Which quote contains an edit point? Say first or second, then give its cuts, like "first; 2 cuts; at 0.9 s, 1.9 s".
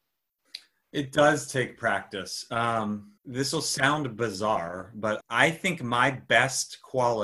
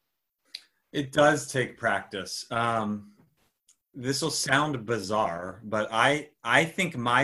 first; 2 cuts; at 3.2 s, 5.2 s